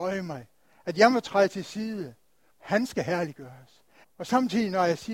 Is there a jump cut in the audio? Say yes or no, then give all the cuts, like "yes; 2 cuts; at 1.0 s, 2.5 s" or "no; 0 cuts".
yes; 2 cuts; at 2.5 s, 4.0 s